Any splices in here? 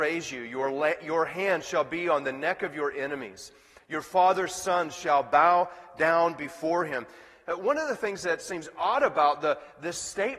no; 0 cuts

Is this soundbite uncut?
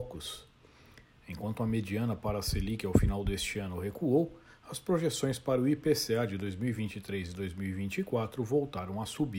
yes; 0 cuts

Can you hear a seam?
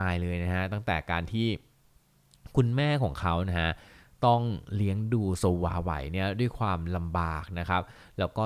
no; 0 cuts

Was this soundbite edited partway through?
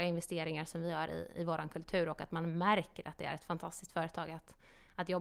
no; 0 cuts

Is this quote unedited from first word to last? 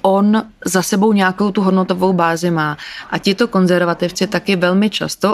no; 1 cut; at 3.1 s

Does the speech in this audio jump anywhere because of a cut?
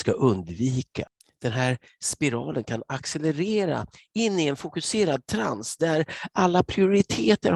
no; 0 cuts

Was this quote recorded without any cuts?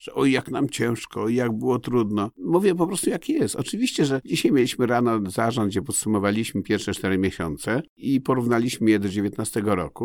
yes; 0 cuts

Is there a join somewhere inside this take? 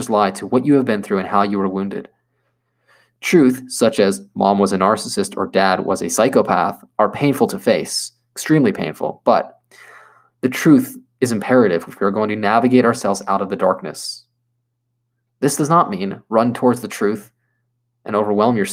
no; 0 cuts

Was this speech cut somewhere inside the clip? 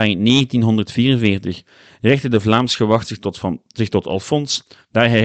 no; 0 cuts

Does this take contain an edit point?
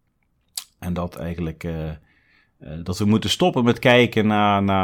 no; 0 cuts

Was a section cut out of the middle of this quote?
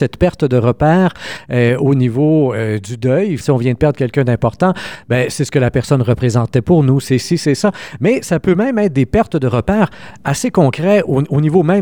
yes; 1 cut; at 3.4 s

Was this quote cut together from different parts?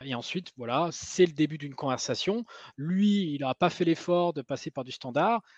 no; 0 cuts

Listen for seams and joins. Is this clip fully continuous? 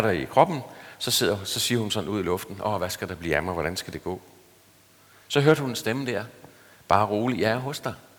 yes; 0 cuts

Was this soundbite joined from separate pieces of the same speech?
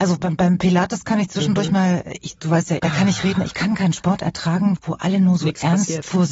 yes; 2 cuts; at 2.8 s, 4.8 s

